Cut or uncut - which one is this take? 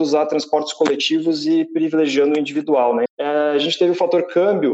cut